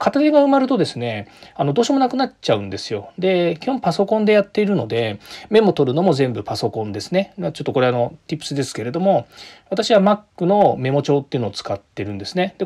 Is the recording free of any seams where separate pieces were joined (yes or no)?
yes